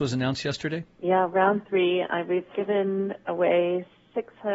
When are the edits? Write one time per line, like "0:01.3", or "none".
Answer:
0:00.9